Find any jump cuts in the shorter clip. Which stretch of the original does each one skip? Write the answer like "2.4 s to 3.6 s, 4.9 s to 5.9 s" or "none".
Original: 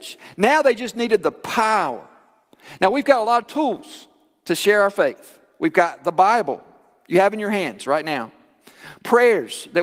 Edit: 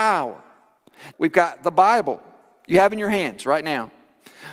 2.8 s to 5.5 s